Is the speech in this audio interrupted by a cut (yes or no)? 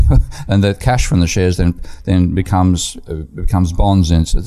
no